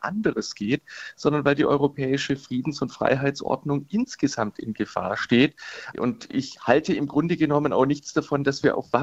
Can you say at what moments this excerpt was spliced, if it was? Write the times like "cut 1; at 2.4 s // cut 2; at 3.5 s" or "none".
cut 1; at 5.9 s